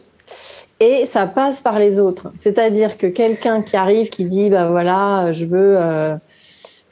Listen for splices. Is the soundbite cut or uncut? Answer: uncut